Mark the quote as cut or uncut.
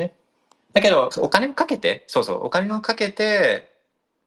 cut